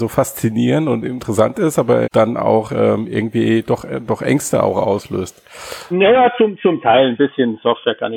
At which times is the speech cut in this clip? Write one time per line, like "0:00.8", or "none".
0:02.0
0:05.9

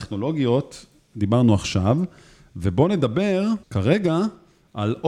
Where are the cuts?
0:03.6

